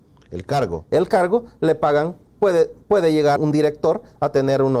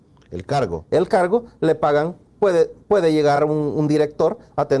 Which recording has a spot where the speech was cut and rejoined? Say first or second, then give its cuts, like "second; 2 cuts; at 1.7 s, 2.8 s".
first; 1 cut; at 3.4 s